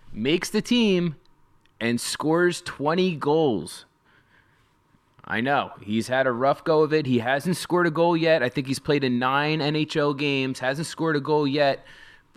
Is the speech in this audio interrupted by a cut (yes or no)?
no